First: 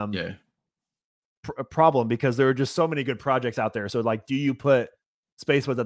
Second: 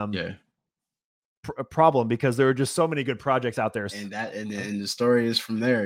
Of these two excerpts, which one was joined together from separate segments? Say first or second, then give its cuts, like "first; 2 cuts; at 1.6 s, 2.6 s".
second; 1 cut; at 3.9 s